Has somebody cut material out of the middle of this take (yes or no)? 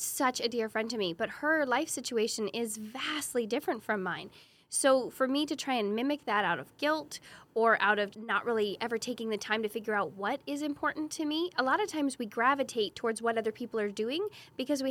yes